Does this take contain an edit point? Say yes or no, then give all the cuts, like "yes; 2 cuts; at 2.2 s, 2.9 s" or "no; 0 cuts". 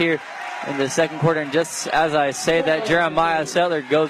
no; 0 cuts